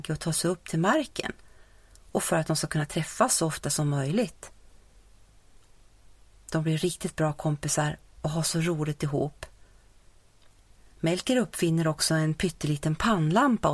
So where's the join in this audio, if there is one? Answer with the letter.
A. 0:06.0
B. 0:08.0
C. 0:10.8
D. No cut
D